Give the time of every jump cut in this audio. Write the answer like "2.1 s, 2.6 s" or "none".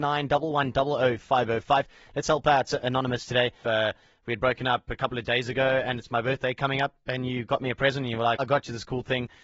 3.6 s, 8.4 s